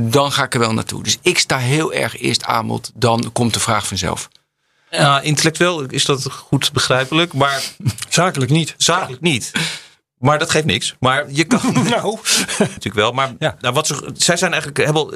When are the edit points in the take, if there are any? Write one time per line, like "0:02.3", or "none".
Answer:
0:12.8